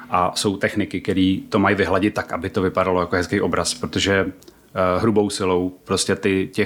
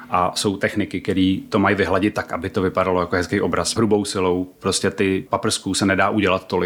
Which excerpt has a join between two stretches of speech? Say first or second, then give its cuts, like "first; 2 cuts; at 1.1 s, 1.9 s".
second; 2 cuts; at 3.8 s, 5.3 s